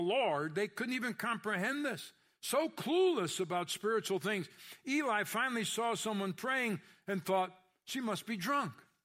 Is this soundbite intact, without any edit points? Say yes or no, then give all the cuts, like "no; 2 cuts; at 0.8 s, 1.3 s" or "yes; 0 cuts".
yes; 0 cuts